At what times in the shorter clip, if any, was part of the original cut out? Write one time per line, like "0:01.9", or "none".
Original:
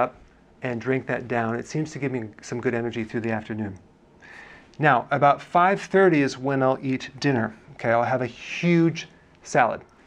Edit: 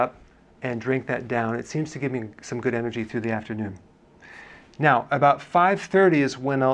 none